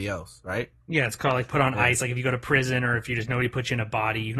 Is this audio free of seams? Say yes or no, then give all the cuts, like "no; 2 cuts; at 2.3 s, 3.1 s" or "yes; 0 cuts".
yes; 0 cuts